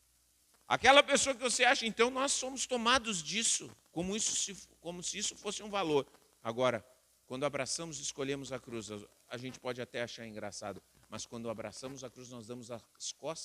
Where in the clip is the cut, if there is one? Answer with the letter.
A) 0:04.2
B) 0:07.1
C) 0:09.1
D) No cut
D